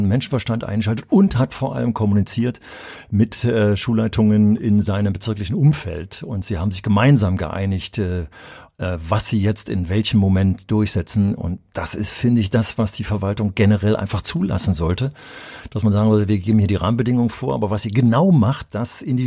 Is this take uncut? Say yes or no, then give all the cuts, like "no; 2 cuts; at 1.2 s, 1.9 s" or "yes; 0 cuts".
yes; 0 cuts